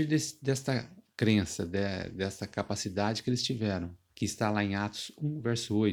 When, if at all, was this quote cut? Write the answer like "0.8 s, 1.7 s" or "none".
4.1 s